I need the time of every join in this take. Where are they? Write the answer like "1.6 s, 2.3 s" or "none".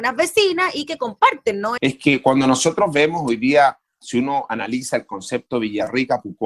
1.8 s

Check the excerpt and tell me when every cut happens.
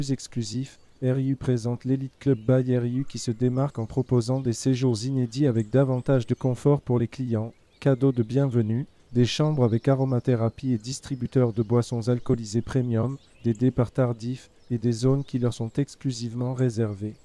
13.3 s

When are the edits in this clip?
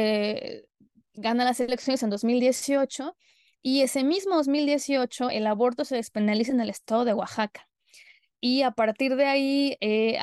5.3 s

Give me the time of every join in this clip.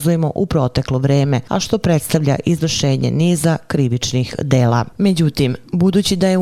none

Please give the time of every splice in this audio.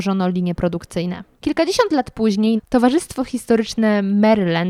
1.3 s, 2.6 s

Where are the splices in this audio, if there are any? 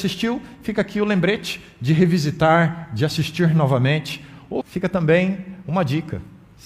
4.6 s

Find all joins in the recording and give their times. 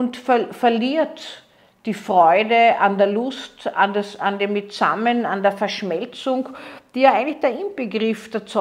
none

